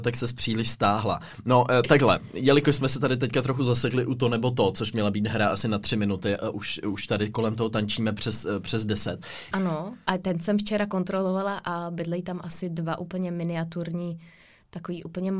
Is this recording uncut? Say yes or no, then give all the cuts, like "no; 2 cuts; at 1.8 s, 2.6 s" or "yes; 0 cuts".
no; 1 cut; at 9.5 s